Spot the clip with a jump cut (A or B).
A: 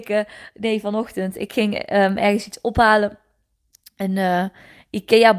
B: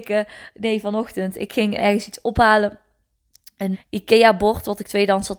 B